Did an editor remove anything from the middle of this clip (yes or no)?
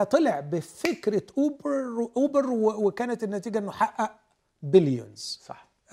no